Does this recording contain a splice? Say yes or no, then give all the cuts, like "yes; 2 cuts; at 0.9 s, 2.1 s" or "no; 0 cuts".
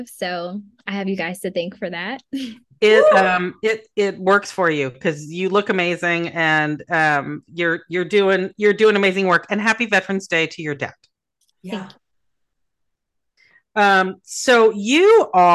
no; 0 cuts